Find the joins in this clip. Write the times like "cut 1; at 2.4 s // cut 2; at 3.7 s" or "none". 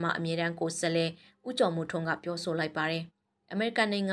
cut 1; at 3.1 s